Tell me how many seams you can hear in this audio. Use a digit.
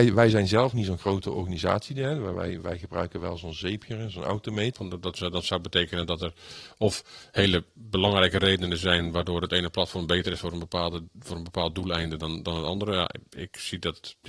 1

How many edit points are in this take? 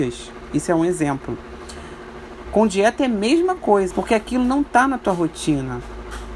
2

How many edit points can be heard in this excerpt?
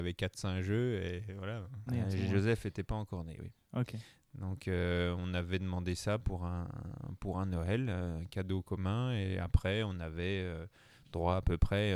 1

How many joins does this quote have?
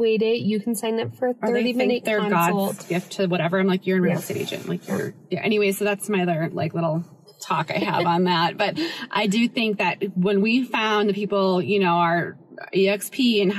0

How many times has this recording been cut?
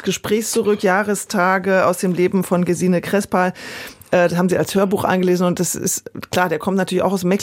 0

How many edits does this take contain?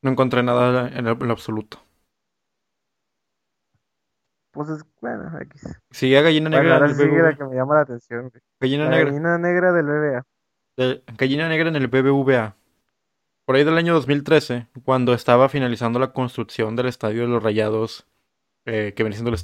0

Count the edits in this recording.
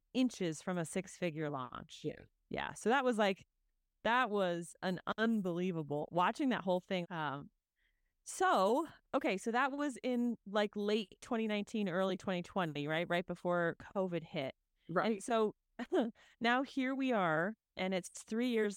1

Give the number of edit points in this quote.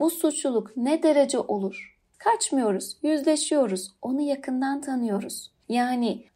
1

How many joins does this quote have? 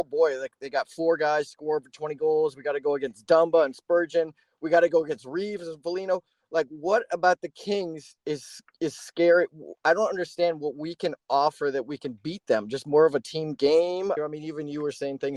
1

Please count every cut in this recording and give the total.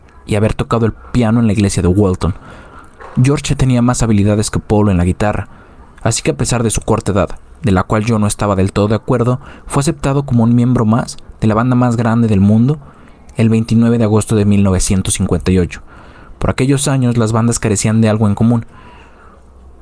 0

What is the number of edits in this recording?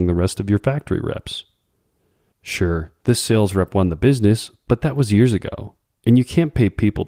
0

